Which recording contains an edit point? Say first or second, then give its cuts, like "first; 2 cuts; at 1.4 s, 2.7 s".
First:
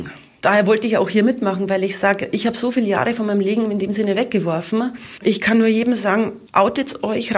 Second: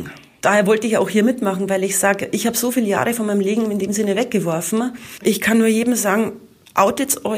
first; 1 cut; at 6.5 s